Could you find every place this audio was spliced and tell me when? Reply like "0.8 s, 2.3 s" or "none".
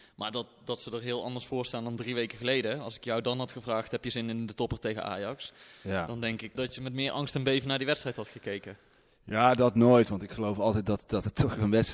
6.6 s